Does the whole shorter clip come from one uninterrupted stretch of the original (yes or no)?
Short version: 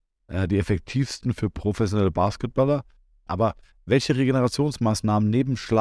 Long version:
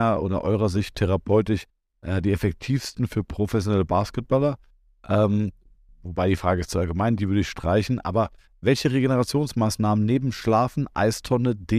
no